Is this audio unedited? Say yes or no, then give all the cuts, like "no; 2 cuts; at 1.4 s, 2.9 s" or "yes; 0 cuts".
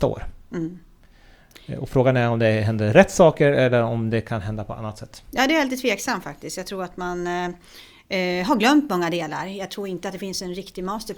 yes; 0 cuts